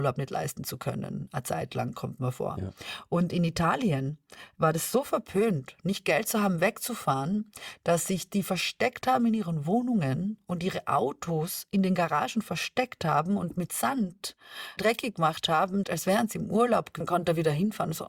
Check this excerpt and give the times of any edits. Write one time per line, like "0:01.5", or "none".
0:14.8
0:15.8
0:17.0